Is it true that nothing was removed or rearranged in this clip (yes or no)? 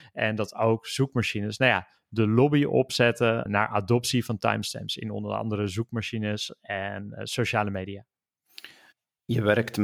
no